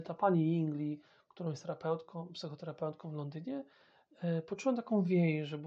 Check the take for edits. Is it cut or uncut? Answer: uncut